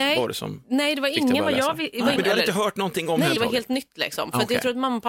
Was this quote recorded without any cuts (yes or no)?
no